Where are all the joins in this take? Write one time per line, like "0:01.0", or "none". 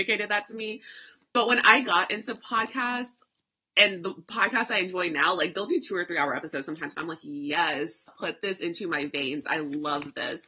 0:08.1